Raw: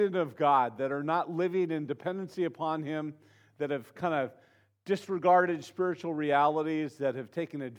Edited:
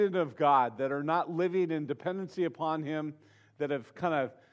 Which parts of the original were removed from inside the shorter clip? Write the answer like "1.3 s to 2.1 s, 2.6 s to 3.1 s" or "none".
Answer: none

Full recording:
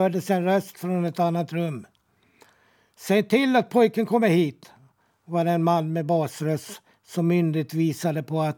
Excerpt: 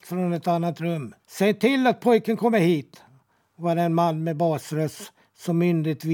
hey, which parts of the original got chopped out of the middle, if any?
1.9 s to 2.9 s

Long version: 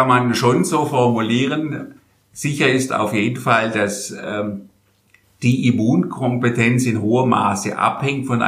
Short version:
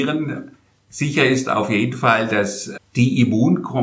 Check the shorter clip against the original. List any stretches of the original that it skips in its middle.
4.2 s to 5.2 s

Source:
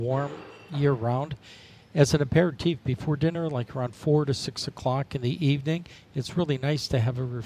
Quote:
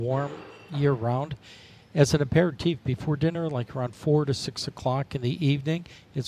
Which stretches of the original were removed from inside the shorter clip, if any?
none

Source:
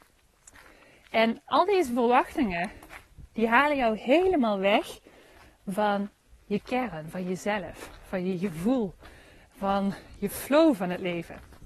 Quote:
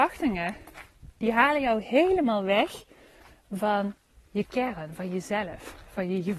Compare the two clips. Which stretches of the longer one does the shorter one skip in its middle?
none

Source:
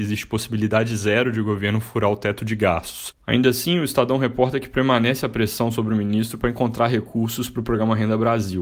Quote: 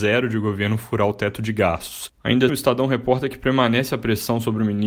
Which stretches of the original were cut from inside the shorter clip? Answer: 3.5 s to 3.8 s

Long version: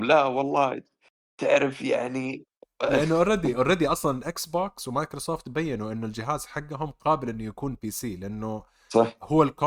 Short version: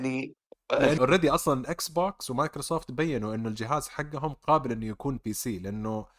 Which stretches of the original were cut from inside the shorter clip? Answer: 3.1 s to 3.5 s

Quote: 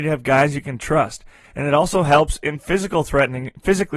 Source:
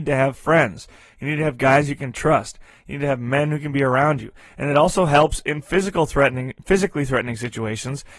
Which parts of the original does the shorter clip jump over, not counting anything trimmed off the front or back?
2.8 s to 4.5 s

